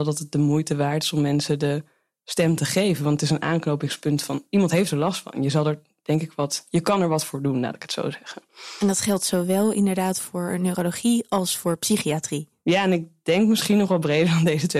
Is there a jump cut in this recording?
no; 0 cuts

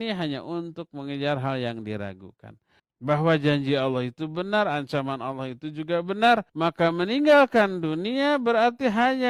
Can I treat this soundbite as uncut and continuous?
no; 2 cuts; at 2.8 s, 6.5 s

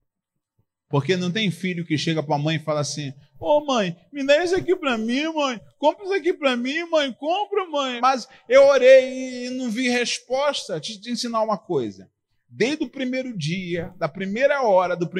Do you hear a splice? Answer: yes; 1 cut; at 8.0 s

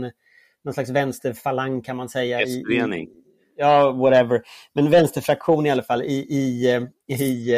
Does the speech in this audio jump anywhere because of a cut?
no; 0 cuts

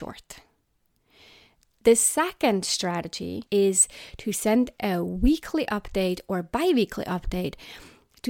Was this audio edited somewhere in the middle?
yes; 1 cut; at 3.5 s

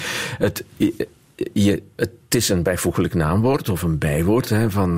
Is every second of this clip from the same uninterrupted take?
yes; 0 cuts

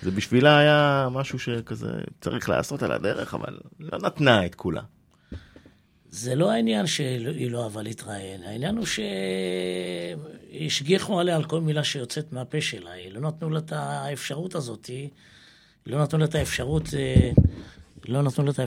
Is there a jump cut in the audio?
no; 0 cuts

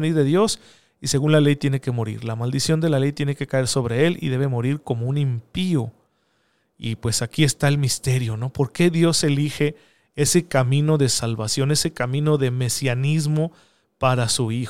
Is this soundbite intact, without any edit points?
yes; 0 cuts

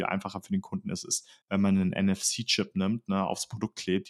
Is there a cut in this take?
no; 0 cuts

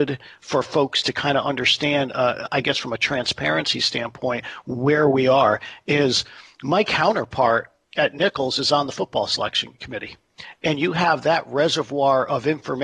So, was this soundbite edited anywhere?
yes; 1 cut; at 10.6 s

